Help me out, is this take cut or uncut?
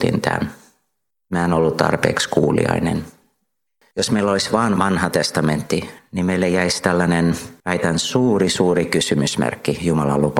uncut